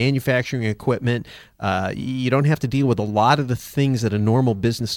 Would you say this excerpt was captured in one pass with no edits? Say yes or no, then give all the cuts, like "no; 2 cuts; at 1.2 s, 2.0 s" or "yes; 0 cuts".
yes; 0 cuts